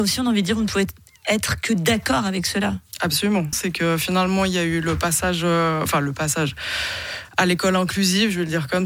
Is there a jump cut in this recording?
yes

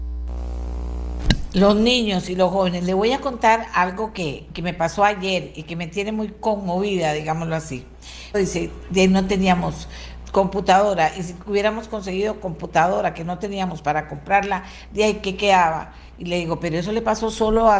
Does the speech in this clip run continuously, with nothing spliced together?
no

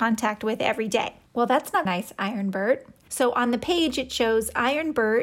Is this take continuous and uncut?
no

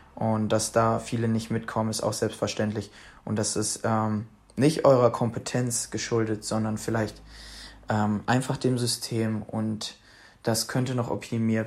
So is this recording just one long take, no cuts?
yes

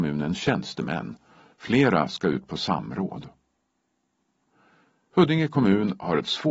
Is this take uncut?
yes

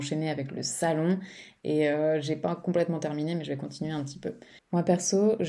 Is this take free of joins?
no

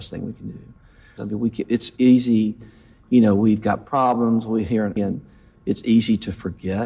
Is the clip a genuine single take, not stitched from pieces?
no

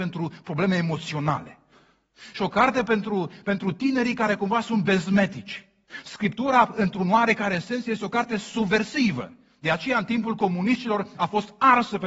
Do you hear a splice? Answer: yes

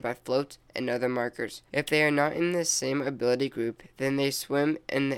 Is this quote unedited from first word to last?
no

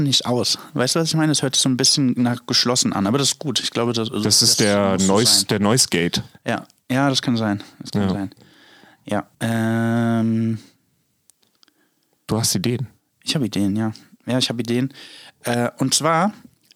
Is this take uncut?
no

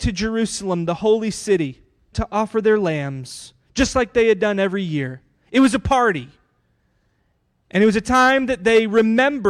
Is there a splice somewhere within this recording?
yes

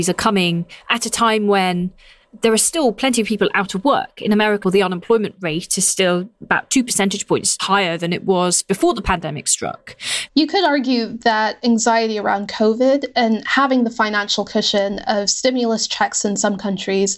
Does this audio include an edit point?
yes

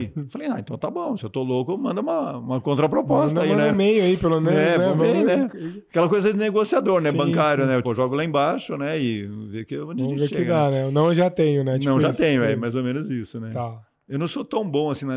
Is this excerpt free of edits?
no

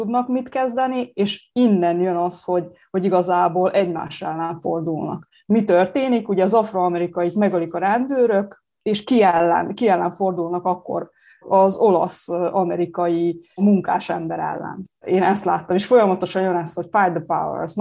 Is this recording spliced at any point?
no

